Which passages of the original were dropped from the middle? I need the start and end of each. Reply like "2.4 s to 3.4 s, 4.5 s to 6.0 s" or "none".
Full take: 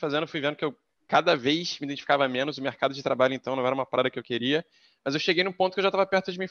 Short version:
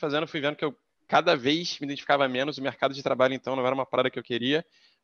none